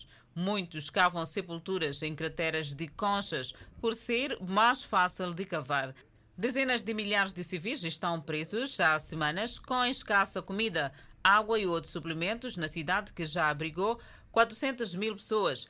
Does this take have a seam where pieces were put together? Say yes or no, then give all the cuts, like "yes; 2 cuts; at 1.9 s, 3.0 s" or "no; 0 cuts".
no; 0 cuts